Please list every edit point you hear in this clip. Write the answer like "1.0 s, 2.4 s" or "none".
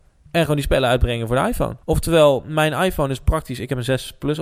1.8 s